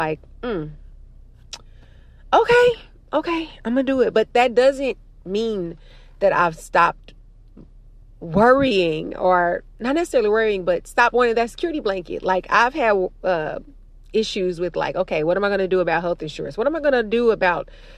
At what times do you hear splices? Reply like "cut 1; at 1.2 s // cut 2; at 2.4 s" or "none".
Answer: none